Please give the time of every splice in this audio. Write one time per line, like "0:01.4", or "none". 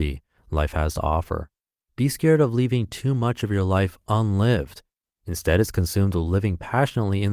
0:01.9
0:05.1